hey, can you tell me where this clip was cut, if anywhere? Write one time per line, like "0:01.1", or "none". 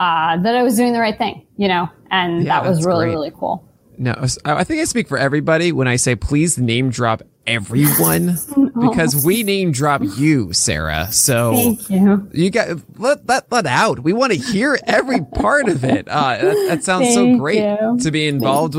none